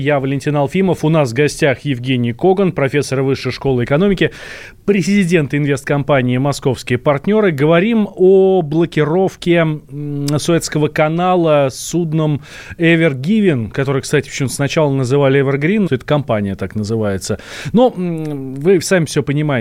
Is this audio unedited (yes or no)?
no